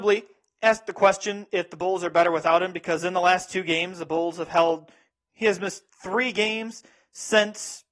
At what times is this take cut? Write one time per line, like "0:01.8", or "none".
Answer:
0:05.1